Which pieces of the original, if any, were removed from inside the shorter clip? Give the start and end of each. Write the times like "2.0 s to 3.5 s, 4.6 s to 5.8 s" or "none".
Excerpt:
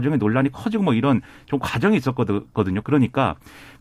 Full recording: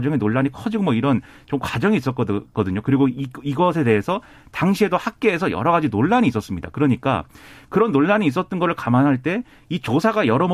2.8 s to 6.7 s